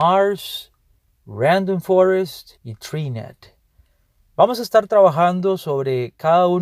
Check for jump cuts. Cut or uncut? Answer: cut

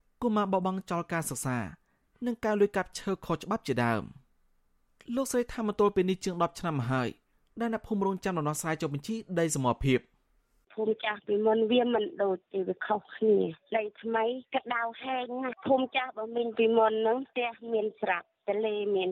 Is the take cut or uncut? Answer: uncut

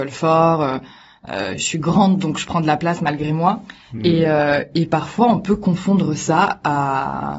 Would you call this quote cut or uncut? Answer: uncut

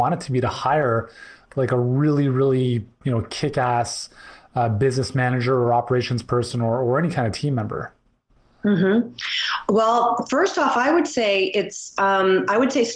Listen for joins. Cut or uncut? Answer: uncut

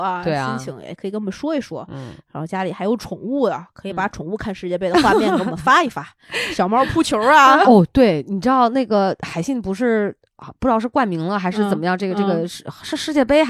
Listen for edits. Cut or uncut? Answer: cut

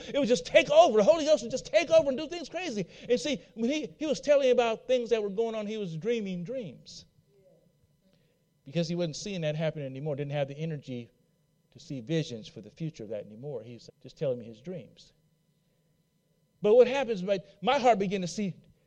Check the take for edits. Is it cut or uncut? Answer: cut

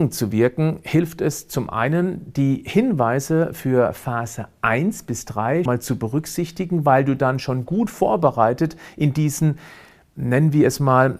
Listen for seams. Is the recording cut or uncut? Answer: cut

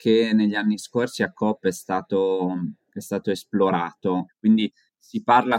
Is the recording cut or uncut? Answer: cut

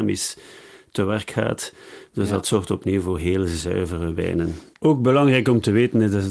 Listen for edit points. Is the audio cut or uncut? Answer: uncut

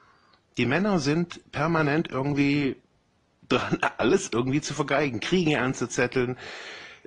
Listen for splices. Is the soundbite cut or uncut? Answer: uncut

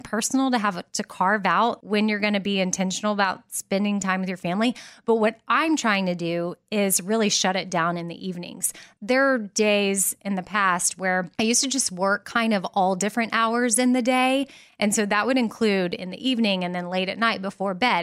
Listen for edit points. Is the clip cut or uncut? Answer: uncut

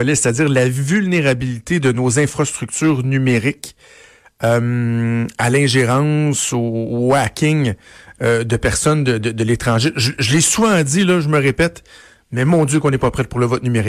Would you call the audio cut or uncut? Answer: uncut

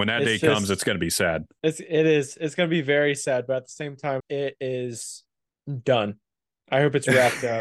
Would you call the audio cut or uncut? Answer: cut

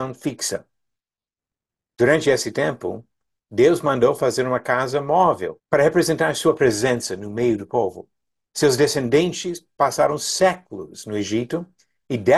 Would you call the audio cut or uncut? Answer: cut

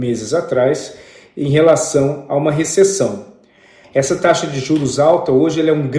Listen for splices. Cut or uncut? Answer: cut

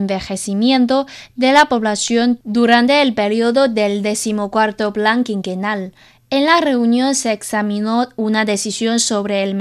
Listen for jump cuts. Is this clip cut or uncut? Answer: uncut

